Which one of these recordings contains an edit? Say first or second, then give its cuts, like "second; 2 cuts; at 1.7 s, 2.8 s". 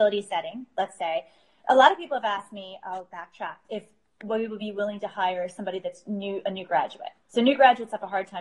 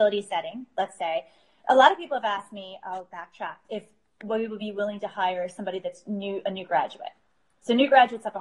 first; 1 cut; at 7.2 s